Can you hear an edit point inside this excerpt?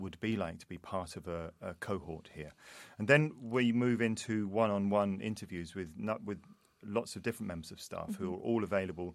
no; 0 cuts

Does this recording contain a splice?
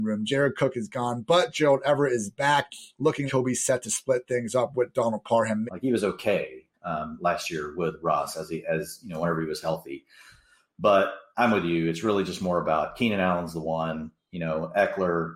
yes; 2 cuts; at 3.3 s, 5.7 s

